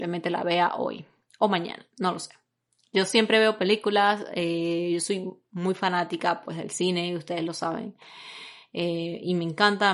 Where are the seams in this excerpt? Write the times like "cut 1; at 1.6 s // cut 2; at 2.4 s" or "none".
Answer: none